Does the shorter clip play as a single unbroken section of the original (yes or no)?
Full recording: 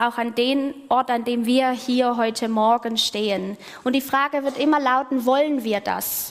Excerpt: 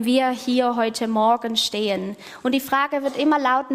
yes